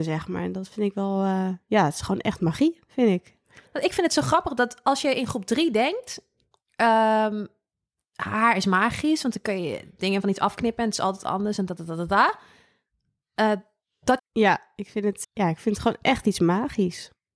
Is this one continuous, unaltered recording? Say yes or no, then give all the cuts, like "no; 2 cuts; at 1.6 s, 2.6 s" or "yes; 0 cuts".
no; 2 cuts; at 14.2 s, 15.2 s